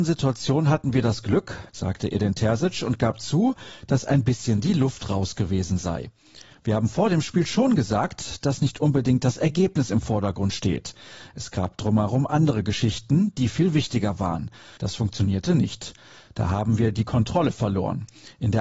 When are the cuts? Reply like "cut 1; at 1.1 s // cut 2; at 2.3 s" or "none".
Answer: cut 1; at 1.7 s // cut 2; at 14.8 s